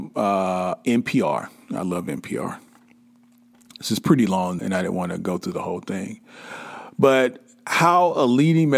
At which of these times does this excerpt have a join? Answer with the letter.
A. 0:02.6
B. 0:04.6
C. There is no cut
B